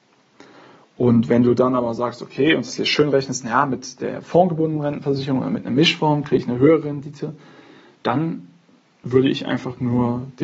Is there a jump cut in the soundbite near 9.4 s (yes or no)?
no